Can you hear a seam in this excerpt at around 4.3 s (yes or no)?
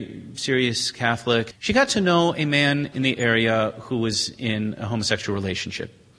no